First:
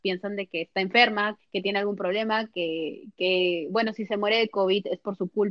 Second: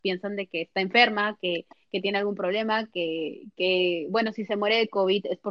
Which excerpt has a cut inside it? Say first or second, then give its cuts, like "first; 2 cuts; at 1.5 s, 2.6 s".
first; 1 cut; at 1.4 s